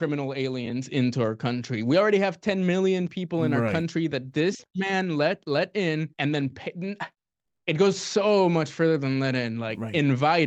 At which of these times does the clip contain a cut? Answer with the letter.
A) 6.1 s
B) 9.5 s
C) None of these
A